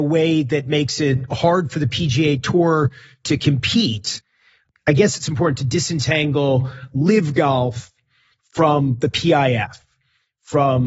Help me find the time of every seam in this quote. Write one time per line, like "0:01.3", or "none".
none